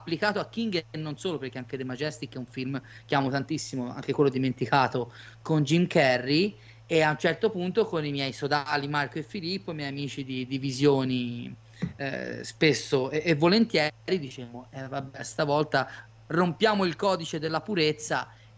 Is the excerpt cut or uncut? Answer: uncut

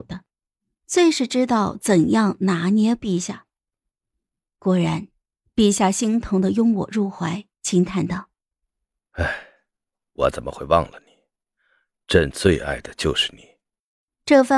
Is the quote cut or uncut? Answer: cut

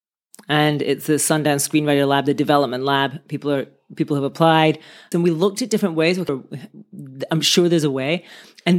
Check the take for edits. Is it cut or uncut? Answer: cut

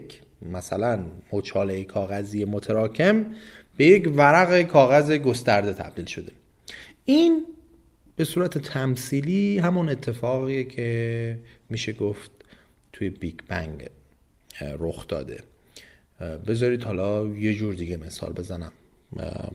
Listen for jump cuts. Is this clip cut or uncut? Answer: uncut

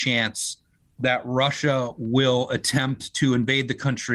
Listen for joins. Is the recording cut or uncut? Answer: uncut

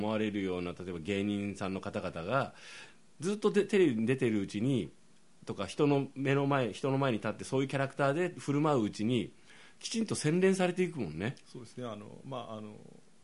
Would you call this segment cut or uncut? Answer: uncut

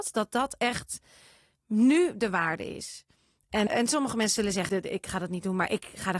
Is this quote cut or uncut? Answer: cut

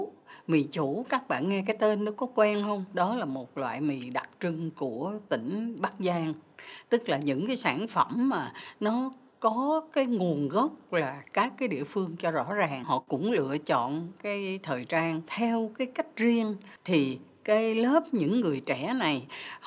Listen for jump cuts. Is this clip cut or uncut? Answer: uncut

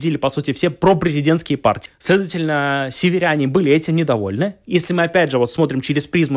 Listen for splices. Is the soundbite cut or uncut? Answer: cut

